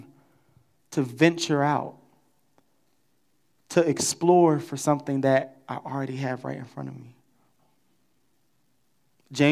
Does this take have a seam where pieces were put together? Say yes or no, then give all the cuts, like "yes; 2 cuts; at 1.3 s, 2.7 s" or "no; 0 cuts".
no; 0 cuts